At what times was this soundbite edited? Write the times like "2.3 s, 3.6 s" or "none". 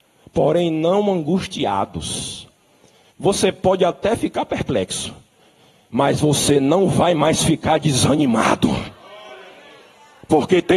3.1 s